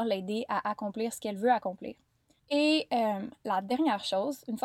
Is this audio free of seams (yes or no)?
no